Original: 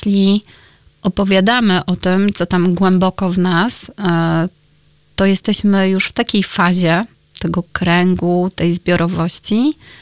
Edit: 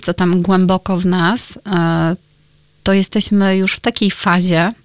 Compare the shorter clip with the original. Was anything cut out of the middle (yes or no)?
no